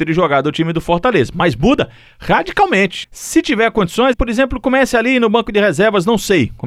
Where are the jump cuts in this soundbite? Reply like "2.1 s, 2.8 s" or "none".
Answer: 3.0 s, 4.1 s